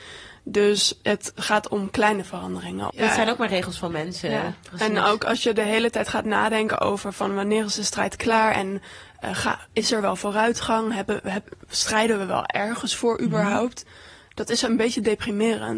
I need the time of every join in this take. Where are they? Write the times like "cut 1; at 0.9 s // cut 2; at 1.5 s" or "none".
cut 1; at 2.9 s

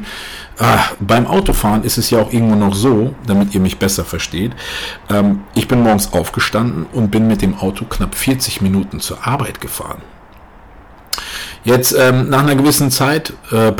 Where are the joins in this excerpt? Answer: none

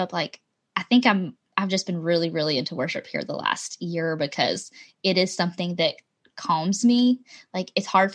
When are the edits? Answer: none

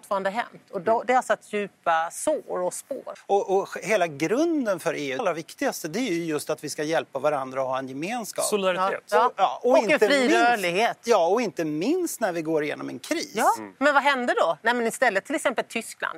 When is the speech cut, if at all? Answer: cut 1; at 5.2 s

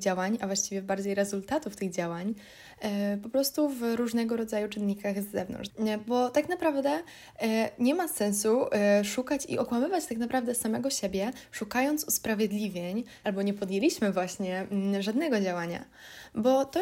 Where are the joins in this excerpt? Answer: cut 1; at 5.7 s // cut 2; at 13.2 s

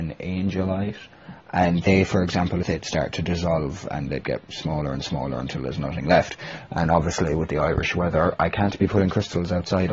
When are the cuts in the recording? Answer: cut 1; at 2.6 s

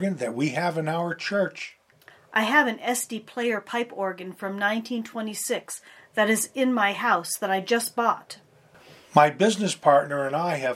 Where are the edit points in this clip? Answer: none

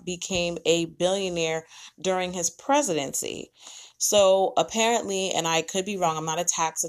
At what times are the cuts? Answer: cut 1; at 3.9 s

